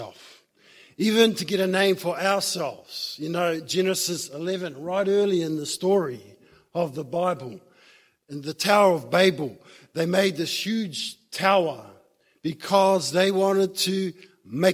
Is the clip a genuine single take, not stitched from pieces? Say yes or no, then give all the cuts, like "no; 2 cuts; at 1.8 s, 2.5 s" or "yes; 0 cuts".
yes; 0 cuts